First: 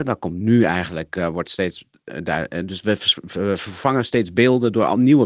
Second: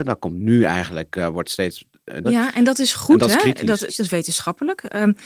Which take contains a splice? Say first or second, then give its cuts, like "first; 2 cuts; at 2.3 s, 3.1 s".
second; 2 cuts; at 2.2 s, 3.9 s